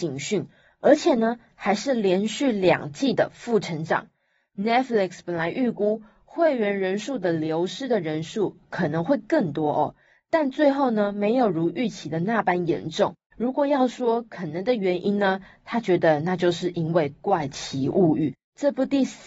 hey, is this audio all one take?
no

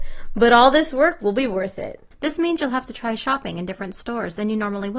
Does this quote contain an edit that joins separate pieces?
yes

